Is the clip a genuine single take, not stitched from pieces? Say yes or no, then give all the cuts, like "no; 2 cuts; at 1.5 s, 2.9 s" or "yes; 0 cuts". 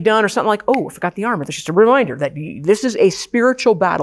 yes; 0 cuts